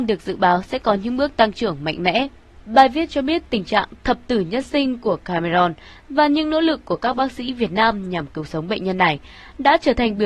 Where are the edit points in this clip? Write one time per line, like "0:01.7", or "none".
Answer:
0:02.6